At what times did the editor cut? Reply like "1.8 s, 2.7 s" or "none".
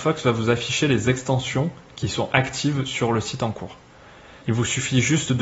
4.4 s